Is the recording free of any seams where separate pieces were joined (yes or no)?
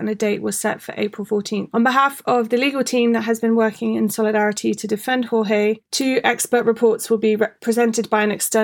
yes